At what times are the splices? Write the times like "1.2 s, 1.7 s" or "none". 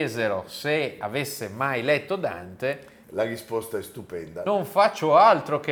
3.0 s